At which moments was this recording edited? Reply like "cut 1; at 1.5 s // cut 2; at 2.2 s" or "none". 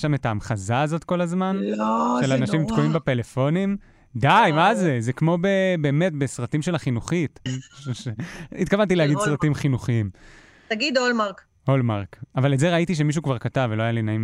cut 1; at 7.5 s

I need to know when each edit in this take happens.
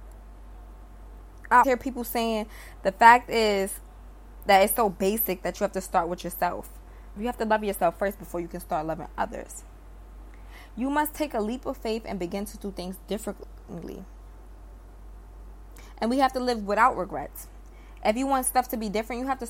cut 1; at 1.6 s // cut 2; at 7.2 s

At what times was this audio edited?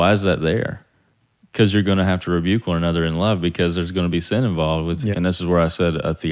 cut 1; at 5.1 s

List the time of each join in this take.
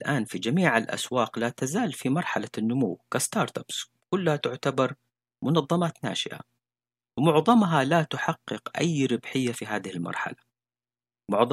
none

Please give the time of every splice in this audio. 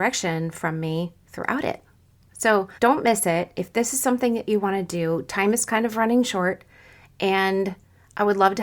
cut 1; at 2.8 s

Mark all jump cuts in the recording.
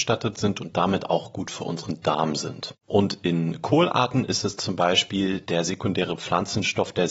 cut 1; at 2.8 s

